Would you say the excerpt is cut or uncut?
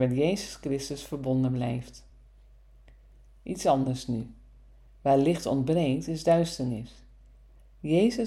uncut